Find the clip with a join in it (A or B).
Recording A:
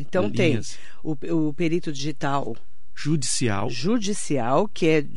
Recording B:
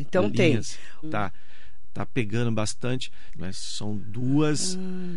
B